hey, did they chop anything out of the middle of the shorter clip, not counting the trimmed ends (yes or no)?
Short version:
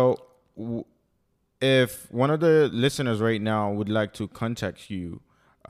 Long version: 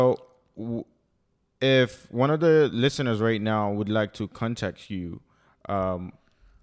no